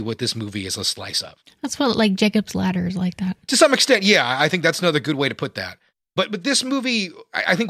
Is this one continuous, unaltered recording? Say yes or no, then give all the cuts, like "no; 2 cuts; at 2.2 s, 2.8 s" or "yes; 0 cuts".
yes; 0 cuts